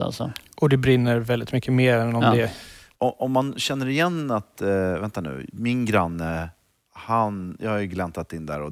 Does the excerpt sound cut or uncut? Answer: uncut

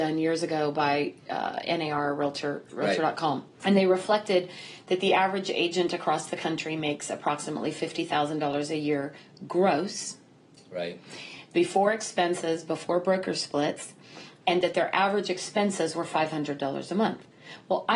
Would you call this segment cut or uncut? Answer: cut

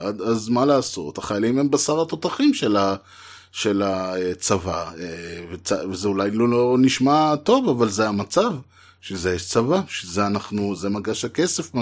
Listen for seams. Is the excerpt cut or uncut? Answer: uncut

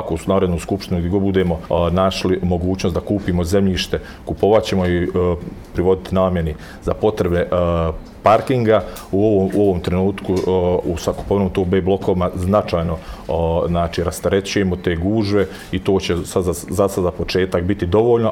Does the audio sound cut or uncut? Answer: uncut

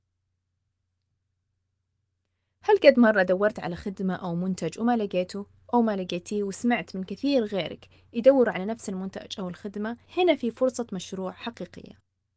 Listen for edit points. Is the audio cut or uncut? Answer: cut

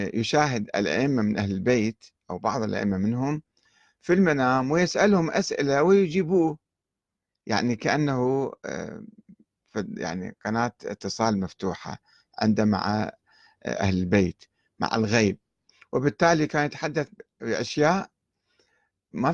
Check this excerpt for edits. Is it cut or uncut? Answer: uncut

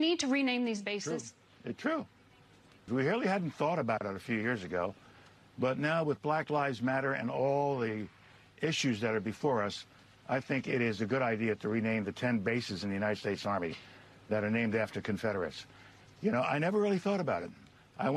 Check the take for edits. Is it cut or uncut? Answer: cut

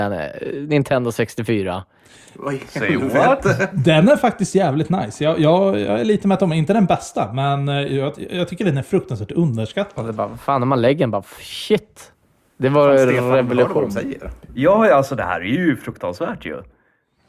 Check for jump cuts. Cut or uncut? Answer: uncut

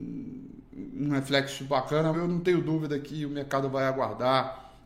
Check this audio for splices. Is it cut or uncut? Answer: cut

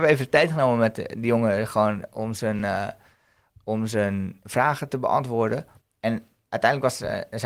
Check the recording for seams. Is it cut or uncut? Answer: uncut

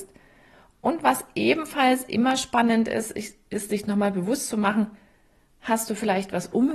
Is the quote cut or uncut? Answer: uncut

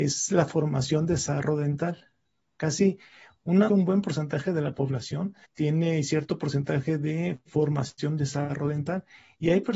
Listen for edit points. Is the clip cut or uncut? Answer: cut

